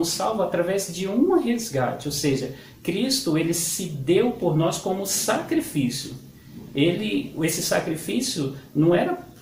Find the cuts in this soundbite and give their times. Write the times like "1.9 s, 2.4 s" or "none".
none